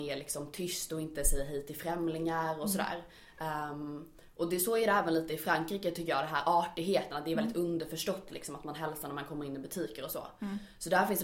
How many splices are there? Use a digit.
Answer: 0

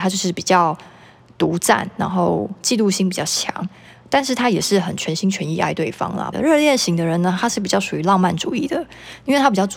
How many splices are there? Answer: 1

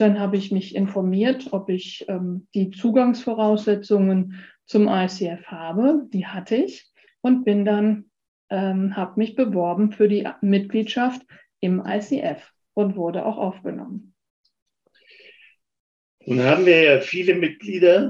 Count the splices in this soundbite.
0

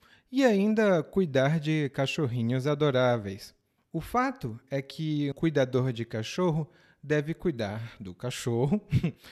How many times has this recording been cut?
2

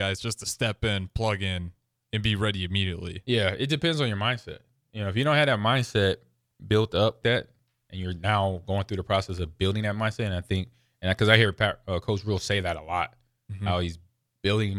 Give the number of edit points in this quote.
1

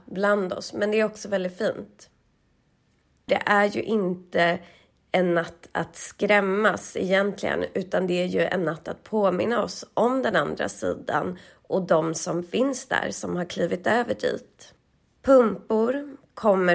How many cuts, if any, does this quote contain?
1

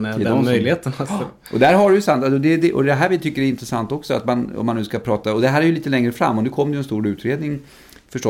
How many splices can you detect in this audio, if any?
0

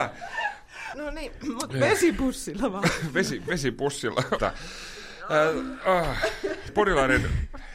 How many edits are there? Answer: 3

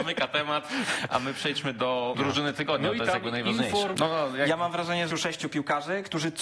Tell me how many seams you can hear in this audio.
3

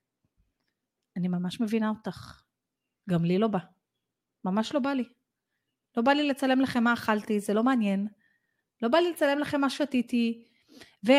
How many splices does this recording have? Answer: 0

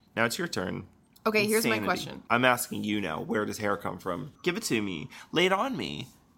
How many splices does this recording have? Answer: 3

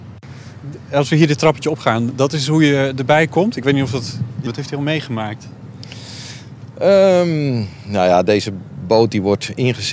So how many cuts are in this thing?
1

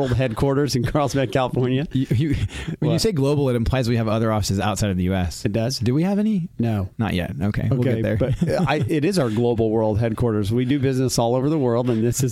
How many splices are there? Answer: 0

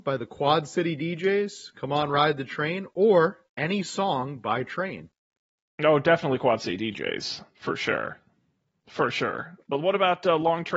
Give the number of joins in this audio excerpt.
1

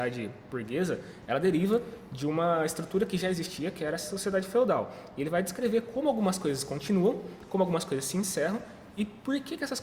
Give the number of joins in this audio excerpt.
0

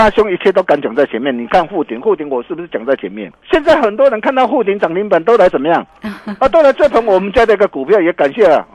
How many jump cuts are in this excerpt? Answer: 1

